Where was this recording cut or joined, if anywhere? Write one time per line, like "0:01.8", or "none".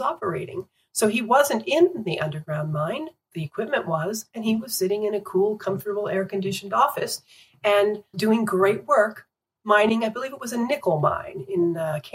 0:08.1